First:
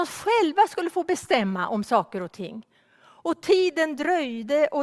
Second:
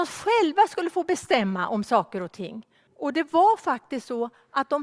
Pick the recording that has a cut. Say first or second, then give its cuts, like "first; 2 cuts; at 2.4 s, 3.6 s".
second; 1 cut; at 2.9 s